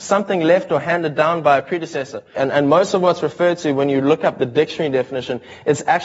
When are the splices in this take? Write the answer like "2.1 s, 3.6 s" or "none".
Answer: 2.4 s

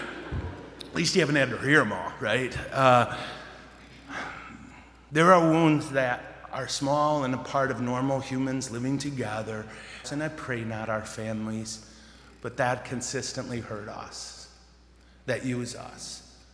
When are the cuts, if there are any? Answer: 10.0 s

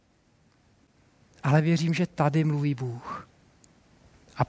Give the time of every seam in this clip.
none

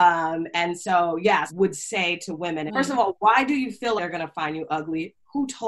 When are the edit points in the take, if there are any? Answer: 1.5 s, 2.7 s, 4.0 s

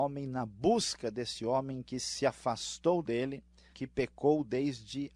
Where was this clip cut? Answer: 3.7 s

